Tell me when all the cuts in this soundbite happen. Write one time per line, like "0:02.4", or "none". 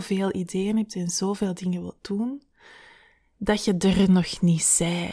none